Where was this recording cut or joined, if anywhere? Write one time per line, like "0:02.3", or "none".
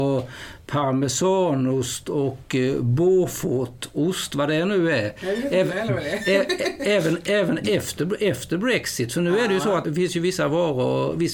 none